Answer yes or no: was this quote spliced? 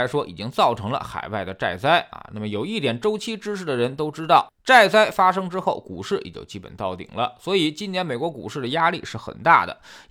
no